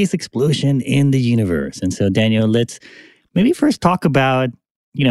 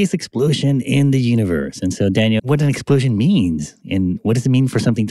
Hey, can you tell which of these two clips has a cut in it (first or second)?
second